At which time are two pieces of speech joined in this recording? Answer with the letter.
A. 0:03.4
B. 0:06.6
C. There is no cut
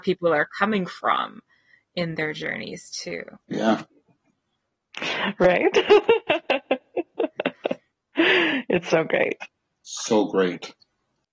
A